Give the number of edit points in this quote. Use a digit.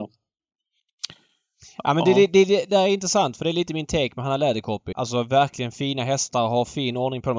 1